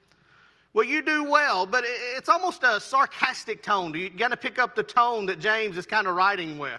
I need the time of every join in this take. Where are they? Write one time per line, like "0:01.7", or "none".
none